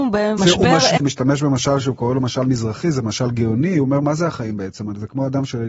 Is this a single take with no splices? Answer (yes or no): no